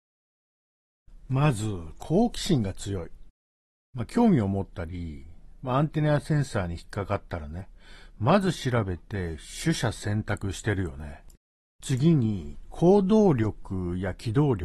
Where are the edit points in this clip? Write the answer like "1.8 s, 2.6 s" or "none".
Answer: none